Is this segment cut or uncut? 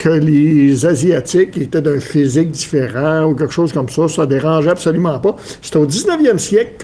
uncut